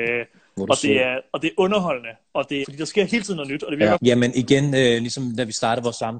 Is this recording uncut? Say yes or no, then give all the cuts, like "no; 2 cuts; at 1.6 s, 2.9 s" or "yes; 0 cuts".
no; 2 cuts; at 2.6 s, 3.9 s